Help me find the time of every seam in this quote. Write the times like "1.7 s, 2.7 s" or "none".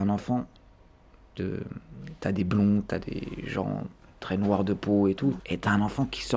1.4 s, 5.4 s